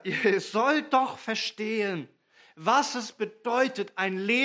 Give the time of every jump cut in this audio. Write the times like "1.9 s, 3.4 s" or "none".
none